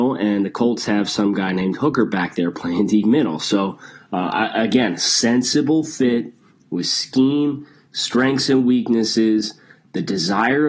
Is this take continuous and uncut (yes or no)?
yes